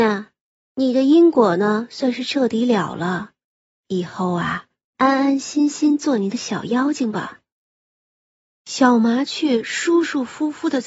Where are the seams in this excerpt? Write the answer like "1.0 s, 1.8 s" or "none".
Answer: none